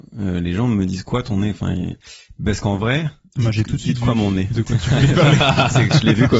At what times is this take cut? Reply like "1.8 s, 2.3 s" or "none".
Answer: none